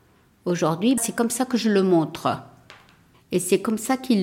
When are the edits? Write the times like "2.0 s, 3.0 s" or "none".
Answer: 1.0 s